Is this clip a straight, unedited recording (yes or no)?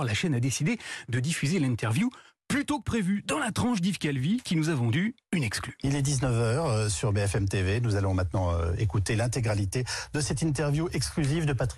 yes